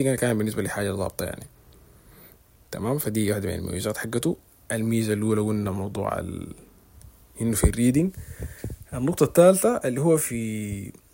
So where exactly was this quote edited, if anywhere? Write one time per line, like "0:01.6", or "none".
0:07.3